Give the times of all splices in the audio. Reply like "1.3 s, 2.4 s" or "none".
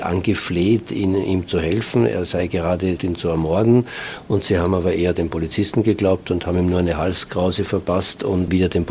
3.0 s